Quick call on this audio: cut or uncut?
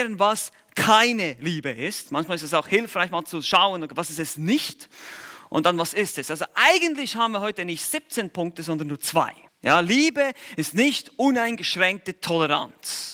cut